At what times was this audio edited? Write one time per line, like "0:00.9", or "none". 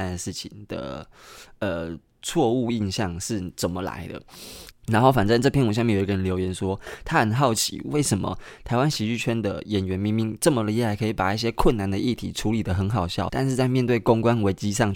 0:04.7
0:13.3